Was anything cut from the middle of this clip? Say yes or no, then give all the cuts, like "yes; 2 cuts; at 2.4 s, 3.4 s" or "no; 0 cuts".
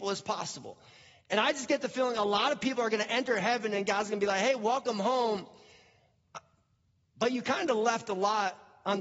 yes; 1 cut; at 1.3 s